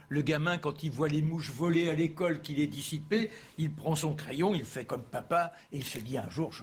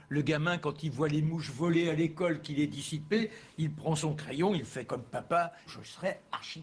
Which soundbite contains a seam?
second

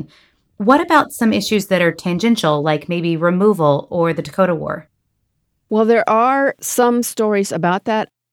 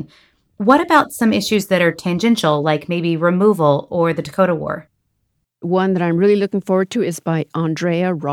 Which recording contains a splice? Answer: second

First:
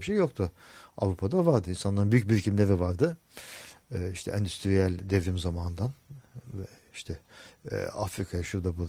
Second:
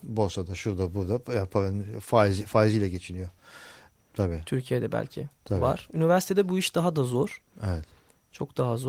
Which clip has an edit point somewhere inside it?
second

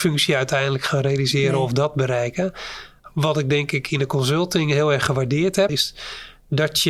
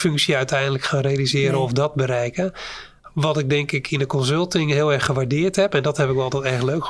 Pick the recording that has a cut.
first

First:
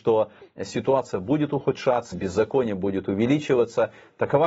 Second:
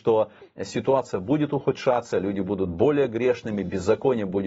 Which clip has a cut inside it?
first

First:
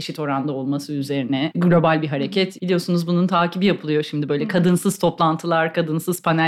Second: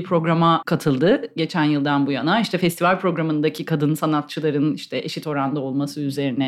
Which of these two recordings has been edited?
first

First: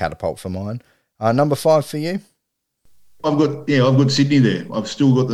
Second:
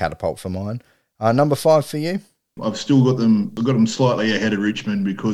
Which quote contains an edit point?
second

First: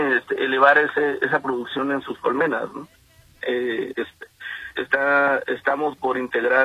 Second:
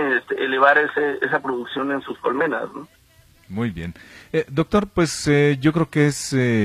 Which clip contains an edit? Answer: first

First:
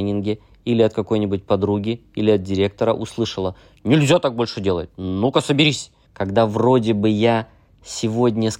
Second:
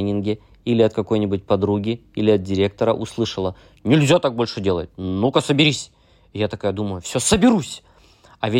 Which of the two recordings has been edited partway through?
first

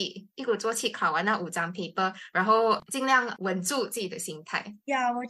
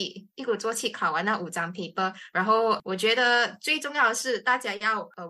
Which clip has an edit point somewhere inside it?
second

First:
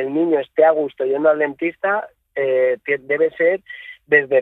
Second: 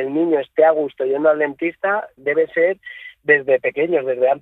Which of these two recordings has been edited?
second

